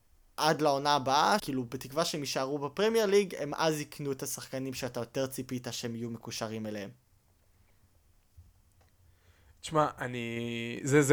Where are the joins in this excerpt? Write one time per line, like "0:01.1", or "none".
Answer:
0:01.4